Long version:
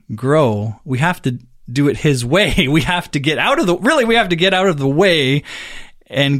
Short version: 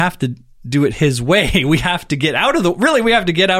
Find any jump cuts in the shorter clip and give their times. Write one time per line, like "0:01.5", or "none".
none